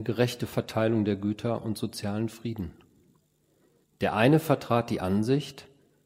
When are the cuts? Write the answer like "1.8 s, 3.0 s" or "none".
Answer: 3.8 s